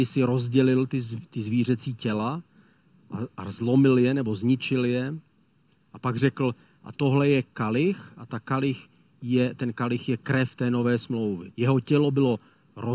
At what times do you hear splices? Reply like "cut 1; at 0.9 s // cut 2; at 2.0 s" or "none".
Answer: cut 1; at 11.5 s